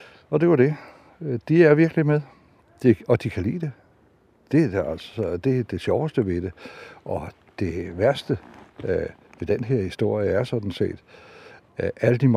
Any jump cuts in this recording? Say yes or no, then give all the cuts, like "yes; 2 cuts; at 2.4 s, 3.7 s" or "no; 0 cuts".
no; 0 cuts